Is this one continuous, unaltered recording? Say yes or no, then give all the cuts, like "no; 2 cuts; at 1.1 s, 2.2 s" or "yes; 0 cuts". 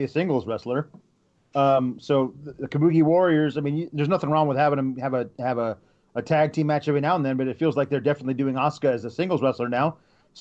yes; 0 cuts